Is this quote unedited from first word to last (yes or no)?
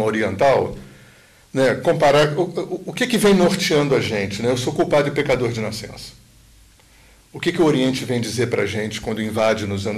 yes